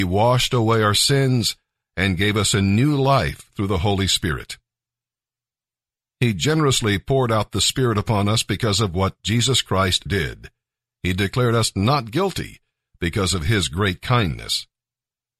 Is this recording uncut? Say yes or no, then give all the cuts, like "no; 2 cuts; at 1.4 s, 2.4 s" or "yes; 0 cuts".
no; 1 cut; at 10.1 s